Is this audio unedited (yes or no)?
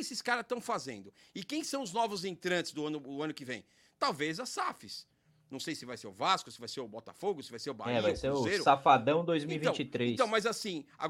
yes